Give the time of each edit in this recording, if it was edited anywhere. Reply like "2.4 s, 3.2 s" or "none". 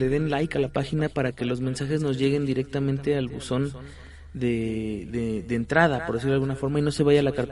none